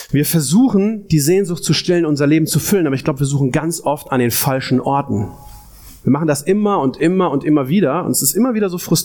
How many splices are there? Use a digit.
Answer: 0